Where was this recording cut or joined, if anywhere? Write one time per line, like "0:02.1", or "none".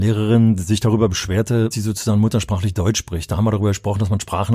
0:01.7